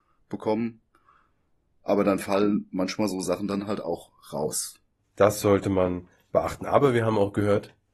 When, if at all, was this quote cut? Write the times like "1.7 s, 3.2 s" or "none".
5.0 s